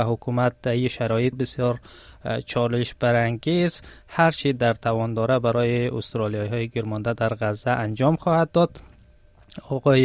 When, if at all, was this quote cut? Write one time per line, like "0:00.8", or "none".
0:01.3